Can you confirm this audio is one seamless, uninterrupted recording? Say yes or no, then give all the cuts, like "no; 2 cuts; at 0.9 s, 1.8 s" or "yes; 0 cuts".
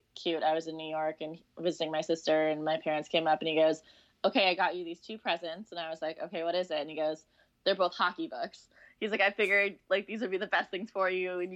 yes; 0 cuts